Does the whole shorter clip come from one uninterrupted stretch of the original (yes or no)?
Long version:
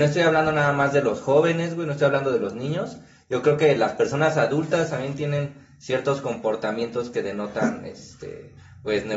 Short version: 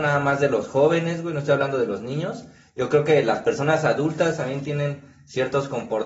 yes